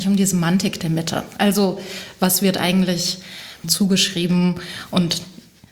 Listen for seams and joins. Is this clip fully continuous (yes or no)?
no